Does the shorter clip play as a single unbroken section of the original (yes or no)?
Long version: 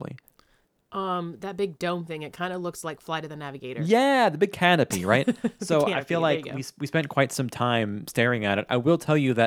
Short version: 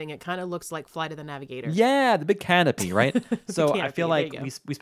yes